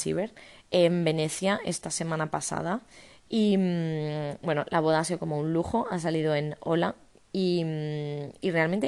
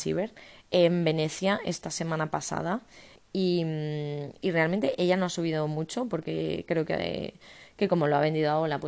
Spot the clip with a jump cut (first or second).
second